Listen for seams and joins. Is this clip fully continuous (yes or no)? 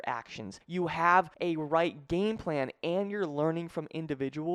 yes